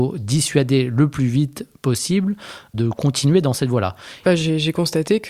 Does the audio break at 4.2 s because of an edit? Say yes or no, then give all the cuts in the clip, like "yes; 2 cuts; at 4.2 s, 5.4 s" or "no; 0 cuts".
yes; 1 cut; at 4.2 s